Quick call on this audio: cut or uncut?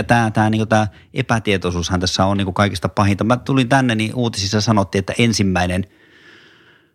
uncut